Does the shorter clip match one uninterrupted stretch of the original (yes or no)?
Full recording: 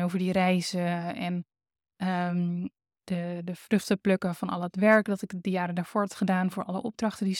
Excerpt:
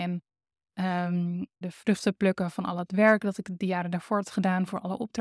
no